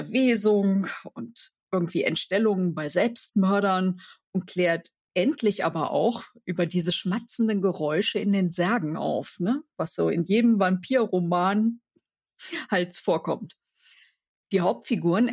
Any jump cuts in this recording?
no; 0 cuts

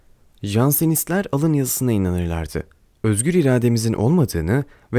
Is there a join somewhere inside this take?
no; 0 cuts

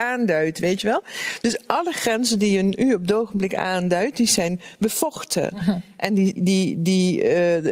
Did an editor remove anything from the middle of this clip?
yes; 1 cut; at 6.4 s

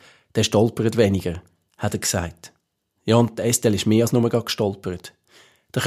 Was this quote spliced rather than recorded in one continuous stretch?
no; 0 cuts

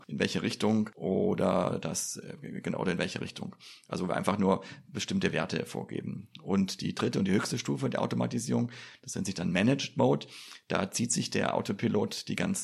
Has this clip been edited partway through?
no; 0 cuts

